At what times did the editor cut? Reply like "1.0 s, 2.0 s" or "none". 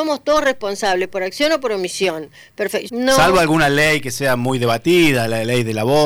2.9 s